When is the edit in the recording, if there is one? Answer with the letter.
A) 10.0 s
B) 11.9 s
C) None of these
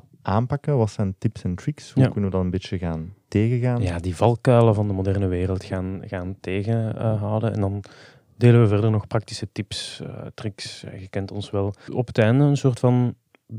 B